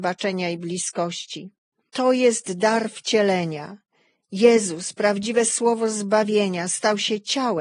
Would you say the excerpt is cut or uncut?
uncut